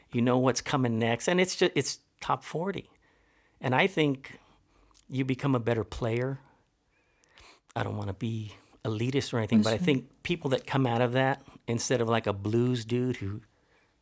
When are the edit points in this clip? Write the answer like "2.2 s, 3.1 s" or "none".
none